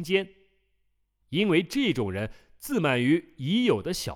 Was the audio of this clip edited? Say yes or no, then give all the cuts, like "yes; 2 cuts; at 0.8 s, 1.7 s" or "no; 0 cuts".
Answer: no; 0 cuts